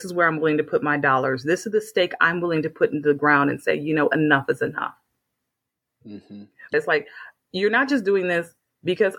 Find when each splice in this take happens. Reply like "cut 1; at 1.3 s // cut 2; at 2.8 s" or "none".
cut 1; at 6.7 s